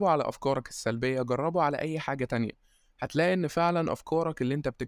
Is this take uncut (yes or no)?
yes